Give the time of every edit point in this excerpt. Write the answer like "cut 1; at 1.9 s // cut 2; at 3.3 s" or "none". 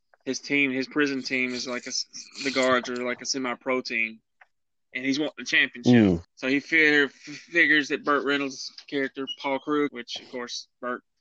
cut 1; at 6.2 s // cut 2; at 9.9 s